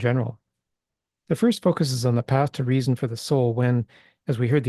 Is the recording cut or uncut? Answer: cut